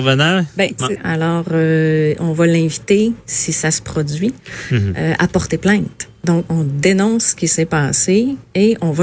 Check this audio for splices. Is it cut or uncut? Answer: cut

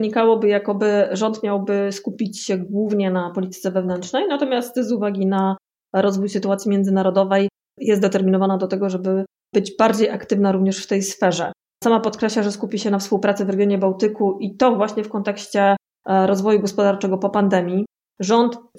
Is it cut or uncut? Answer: cut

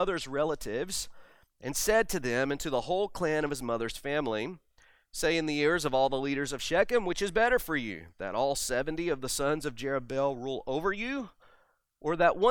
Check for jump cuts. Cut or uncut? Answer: uncut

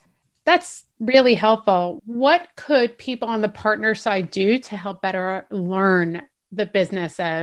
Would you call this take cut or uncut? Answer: uncut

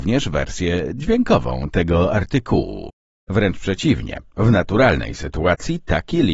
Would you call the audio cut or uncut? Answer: cut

